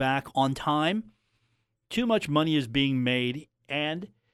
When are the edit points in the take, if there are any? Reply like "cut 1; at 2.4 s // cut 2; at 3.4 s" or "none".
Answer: cut 1; at 1.8 s